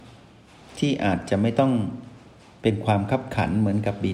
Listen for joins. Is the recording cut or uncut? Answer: uncut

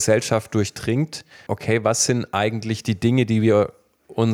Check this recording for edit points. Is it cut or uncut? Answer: cut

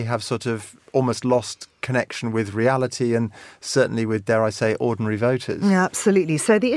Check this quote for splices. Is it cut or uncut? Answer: uncut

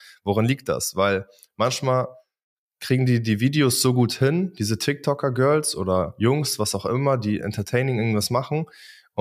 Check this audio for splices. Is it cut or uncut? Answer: uncut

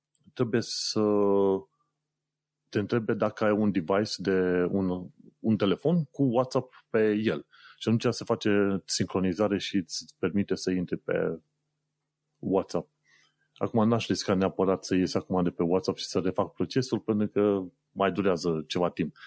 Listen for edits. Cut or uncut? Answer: uncut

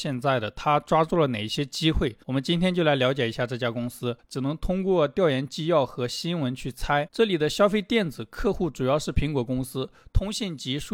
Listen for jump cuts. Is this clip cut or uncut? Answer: cut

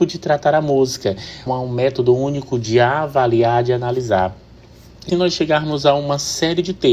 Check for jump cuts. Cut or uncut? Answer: cut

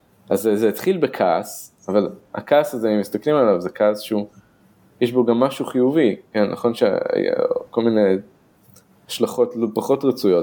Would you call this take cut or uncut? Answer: uncut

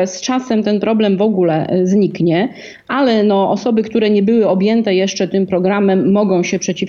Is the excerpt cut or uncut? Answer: uncut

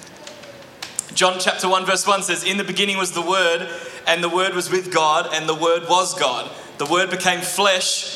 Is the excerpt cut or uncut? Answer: uncut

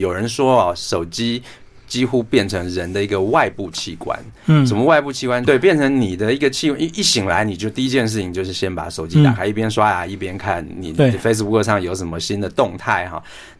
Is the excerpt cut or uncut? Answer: cut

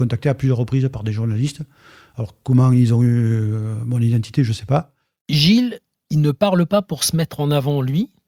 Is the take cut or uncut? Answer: uncut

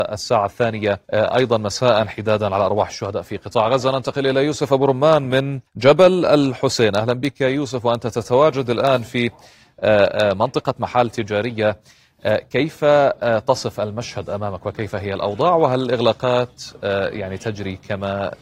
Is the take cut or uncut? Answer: cut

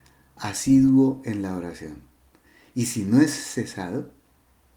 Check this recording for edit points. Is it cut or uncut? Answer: uncut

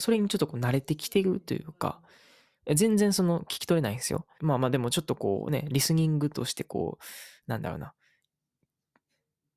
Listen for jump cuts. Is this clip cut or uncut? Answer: cut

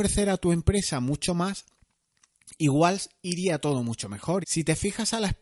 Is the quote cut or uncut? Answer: cut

